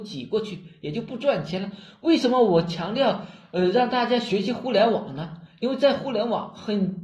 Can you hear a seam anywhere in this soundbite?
no; 0 cuts

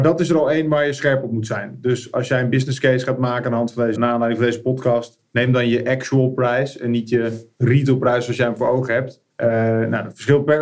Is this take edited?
yes; 2 cuts; at 3.9 s, 9.3 s

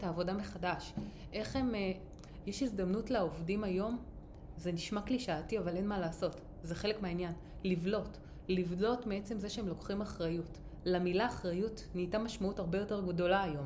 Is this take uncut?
no; 1 cut; at 2.4 s

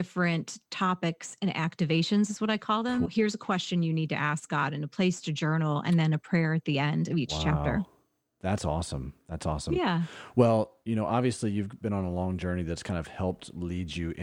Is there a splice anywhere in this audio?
yes; 1 cut; at 3.0 s

